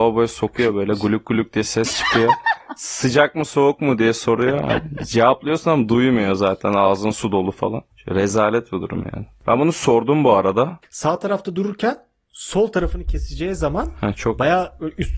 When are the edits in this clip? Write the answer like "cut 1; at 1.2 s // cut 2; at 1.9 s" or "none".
cut 1; at 7.9 s // cut 2; at 10.8 s